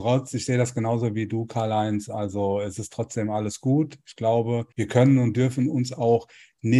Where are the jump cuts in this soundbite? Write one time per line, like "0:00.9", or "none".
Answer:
0:04.7